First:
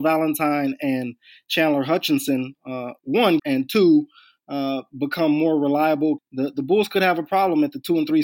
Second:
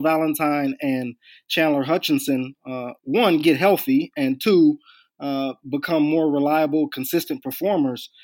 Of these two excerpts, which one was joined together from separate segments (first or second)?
first